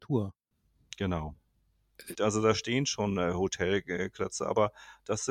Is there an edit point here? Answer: yes; 1 cut; at 2.1 s

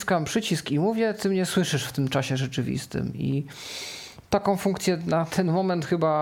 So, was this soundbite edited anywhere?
no; 0 cuts

